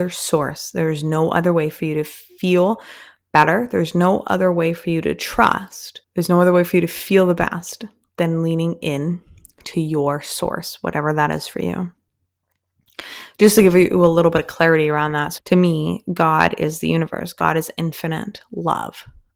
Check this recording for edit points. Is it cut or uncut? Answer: cut